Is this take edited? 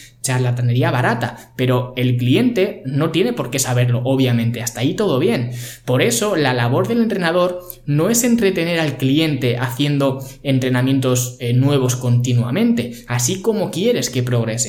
no; 0 cuts

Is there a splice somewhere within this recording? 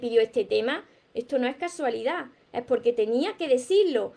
no; 0 cuts

